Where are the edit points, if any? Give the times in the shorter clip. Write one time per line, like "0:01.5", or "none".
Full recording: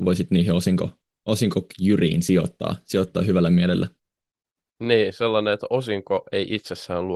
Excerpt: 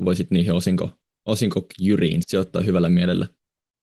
0:02.2